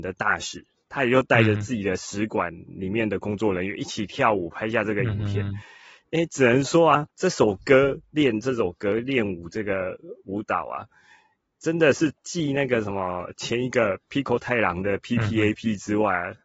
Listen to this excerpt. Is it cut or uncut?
uncut